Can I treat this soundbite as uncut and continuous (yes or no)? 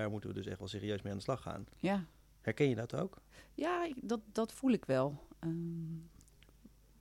no